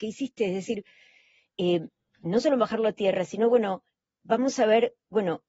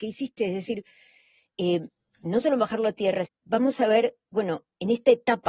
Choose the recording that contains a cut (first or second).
second